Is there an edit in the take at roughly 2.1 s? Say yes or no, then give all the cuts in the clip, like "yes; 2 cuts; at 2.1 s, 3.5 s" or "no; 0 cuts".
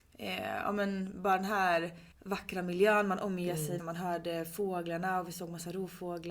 yes; 2 cuts; at 2.1 s, 3.8 s